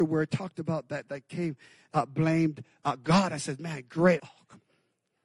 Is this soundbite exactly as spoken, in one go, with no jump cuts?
no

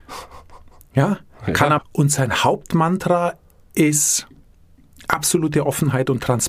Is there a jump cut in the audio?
yes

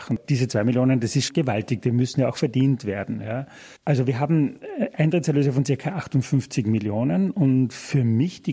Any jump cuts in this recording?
yes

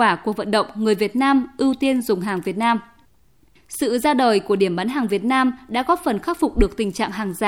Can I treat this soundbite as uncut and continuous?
no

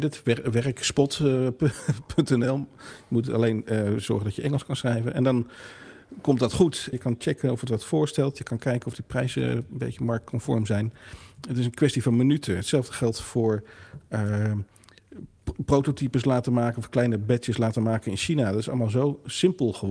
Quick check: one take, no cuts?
no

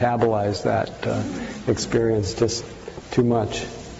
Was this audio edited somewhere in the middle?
no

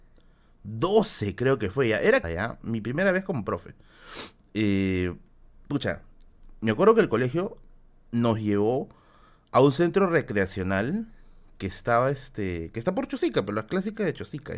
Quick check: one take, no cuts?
no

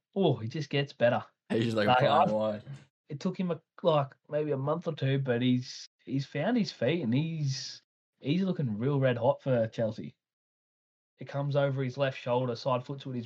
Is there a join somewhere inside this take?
yes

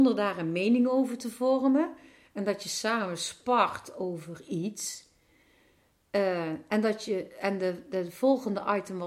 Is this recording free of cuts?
yes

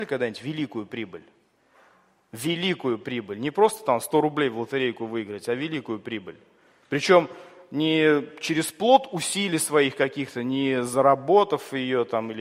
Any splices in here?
no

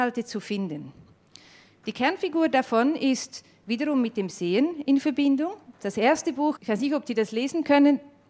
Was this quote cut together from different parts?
yes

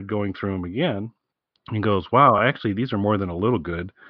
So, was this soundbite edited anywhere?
no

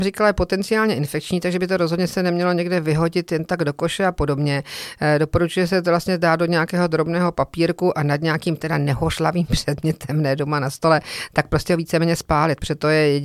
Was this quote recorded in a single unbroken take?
yes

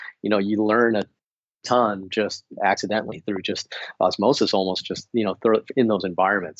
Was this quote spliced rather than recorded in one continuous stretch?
no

